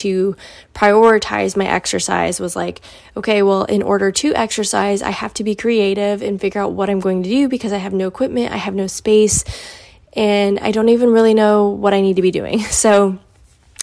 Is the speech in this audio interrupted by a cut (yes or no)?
no